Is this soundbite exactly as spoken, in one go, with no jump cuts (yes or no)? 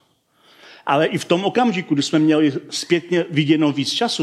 yes